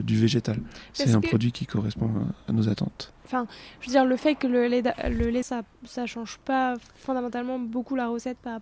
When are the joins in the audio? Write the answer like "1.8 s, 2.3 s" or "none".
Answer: 3.3 s, 5.4 s